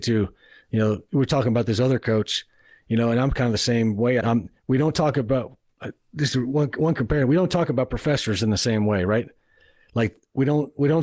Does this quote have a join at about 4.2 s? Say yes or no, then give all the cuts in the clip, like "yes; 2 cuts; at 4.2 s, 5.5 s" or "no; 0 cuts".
yes; 1 cut; at 4.2 s